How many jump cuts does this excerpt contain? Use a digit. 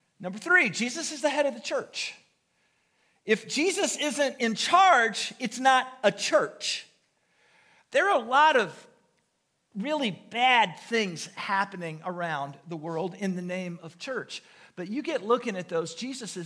0